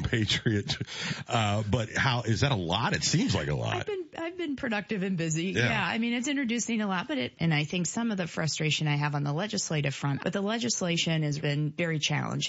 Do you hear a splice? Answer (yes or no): yes